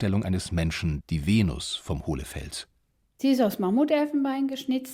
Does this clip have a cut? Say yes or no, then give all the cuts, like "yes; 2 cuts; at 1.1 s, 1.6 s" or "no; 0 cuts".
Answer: yes; 1 cut; at 1.0 s